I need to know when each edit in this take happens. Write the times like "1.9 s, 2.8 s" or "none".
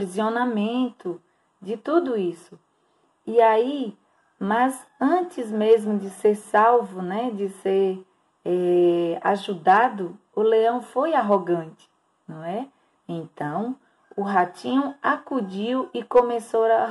13.0 s